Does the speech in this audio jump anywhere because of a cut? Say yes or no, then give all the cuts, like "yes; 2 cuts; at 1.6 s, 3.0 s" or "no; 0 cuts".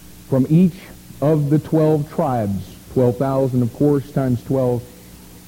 no; 0 cuts